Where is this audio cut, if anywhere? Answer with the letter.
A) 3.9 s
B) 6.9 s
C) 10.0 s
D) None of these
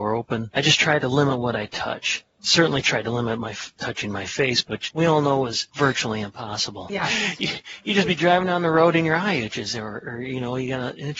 B